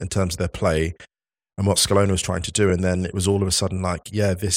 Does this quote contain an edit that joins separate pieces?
no; 0 cuts

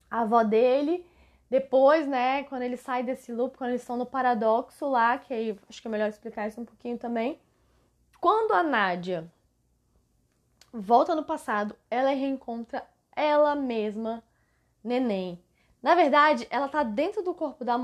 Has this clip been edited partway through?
no; 0 cuts

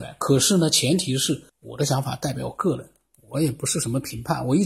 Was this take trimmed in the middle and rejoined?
yes; 1 cut; at 1.5 s

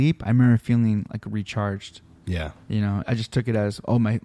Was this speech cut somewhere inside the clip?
yes; 1 cut; at 3.0 s

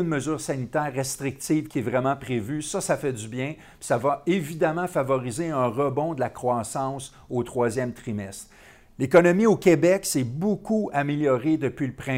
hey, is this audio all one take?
yes; 0 cuts

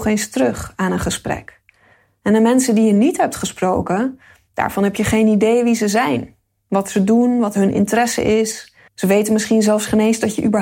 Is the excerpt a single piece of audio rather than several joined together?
no; 1 cut; at 8.9 s

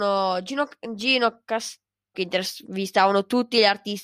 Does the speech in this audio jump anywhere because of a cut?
yes; 1 cut; at 2.1 s

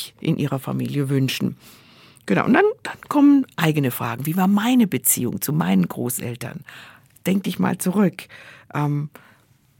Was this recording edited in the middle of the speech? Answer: no; 0 cuts

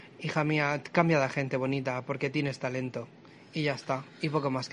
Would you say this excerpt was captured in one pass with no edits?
yes; 0 cuts

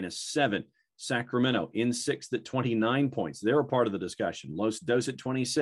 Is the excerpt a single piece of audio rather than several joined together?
yes; 0 cuts

